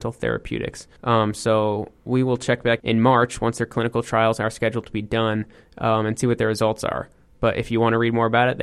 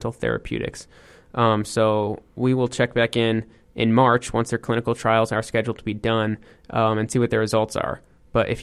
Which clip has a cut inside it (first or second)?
first